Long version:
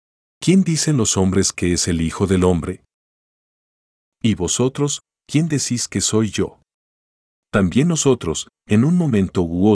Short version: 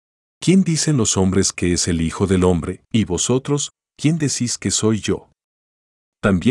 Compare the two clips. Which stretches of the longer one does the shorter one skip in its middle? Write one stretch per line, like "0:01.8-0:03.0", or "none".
0:02.9-0:04.2

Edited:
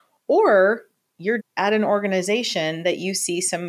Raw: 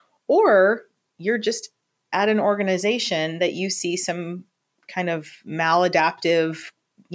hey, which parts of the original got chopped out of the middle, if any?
0:01.4-0:02.0

